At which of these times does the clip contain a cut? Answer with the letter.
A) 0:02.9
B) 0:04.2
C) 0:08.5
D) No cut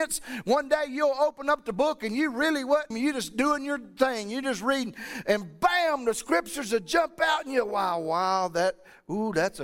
A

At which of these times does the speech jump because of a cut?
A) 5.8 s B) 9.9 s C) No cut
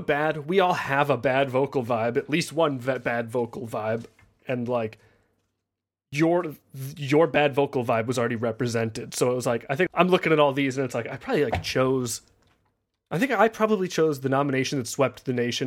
B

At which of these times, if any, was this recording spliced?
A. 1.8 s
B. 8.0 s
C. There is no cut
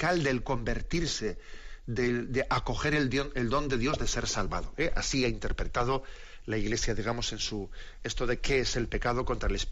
B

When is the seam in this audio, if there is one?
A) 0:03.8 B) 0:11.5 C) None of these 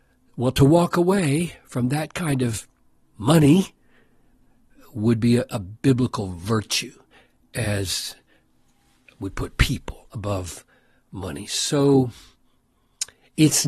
C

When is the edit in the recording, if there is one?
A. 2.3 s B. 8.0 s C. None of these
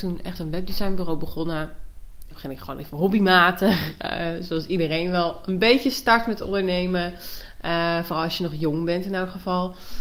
A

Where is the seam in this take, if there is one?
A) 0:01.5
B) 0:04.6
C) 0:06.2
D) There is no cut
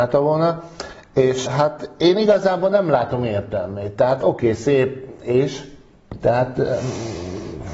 A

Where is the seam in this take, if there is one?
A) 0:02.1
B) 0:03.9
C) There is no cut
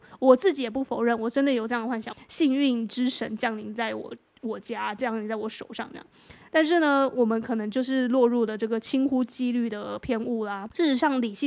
A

